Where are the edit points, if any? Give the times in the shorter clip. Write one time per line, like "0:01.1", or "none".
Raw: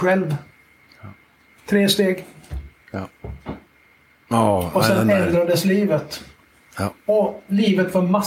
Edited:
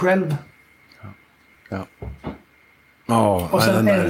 0:01.5